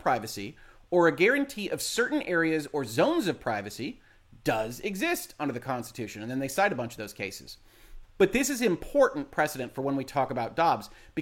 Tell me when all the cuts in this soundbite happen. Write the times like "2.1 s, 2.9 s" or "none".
8.0 s